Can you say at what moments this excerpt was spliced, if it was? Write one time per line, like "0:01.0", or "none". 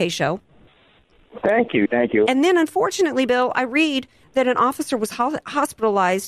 0:02.2